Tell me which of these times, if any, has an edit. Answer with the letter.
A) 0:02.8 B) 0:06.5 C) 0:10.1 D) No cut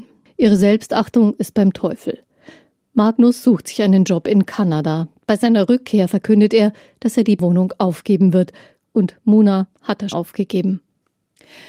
C